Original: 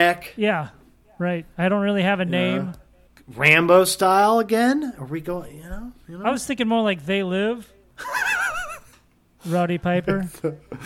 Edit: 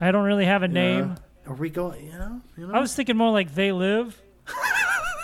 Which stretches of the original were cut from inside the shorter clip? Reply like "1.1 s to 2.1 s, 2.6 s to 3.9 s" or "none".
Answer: 3.0 s to 4.9 s